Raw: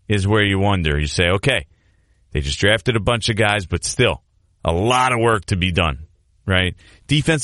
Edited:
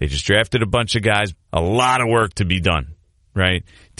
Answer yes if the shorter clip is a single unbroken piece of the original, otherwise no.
no